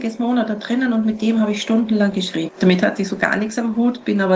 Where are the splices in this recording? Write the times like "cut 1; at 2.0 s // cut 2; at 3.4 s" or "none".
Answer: cut 1; at 2.5 s